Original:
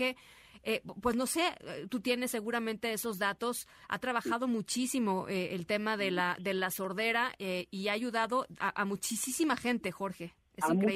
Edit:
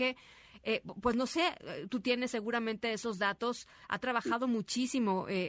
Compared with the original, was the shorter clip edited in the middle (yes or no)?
no